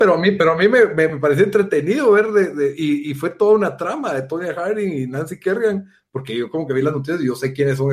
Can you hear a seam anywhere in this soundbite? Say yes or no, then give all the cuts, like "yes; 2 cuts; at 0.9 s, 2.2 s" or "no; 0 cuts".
no; 0 cuts